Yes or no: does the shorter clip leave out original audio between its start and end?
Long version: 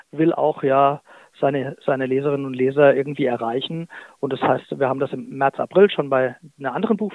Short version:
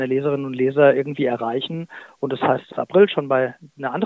yes